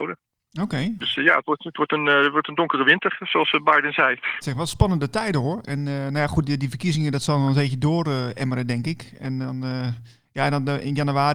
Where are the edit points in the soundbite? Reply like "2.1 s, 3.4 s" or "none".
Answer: 4.4 s